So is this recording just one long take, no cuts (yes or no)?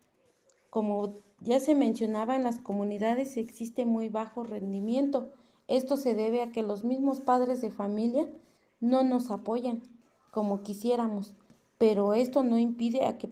yes